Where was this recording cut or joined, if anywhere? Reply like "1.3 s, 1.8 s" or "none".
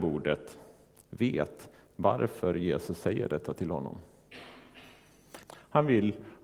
5.4 s